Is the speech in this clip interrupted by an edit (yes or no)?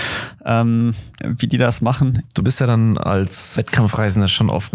yes